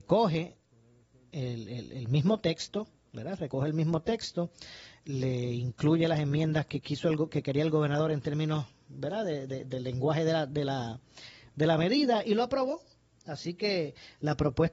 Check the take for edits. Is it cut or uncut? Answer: uncut